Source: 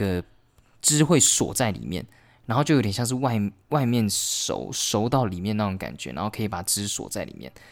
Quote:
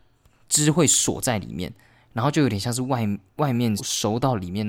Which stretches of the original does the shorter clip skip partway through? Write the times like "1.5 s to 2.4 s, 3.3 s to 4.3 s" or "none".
4.1 s to 4.7 s